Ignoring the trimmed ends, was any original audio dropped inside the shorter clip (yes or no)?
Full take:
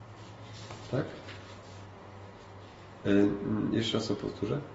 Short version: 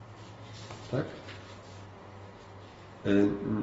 no